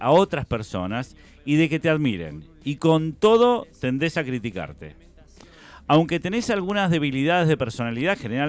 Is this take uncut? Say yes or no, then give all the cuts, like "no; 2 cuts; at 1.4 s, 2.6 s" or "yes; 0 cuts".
yes; 0 cuts